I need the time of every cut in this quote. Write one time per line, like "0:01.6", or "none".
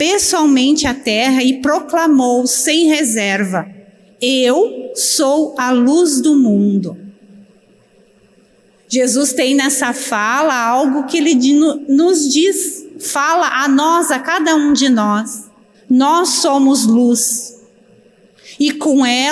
0:15.7